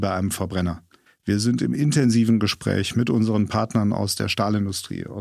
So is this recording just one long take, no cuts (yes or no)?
no